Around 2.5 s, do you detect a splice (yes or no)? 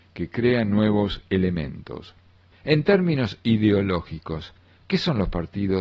yes